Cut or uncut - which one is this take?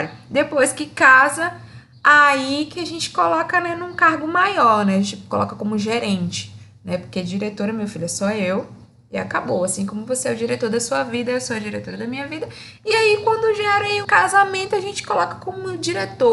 cut